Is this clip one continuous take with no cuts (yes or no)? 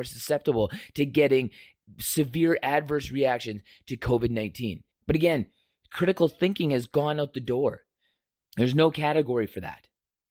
no